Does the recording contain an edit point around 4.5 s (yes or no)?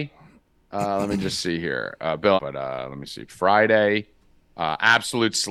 no